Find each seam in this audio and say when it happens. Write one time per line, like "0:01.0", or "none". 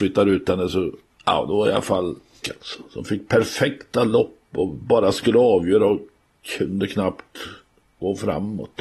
0:02.4